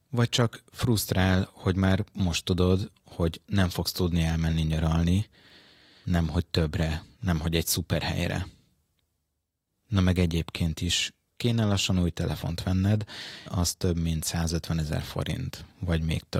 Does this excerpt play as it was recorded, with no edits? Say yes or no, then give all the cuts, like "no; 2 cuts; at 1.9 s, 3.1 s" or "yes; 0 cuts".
no; 2 cuts; at 6.0 s, 13.5 s